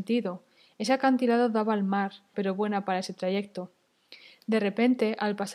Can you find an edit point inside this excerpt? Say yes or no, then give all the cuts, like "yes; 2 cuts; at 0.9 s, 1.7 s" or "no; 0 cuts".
yes; 1 cut; at 2.3 s